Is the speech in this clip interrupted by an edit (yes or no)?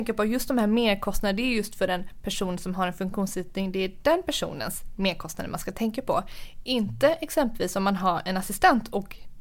no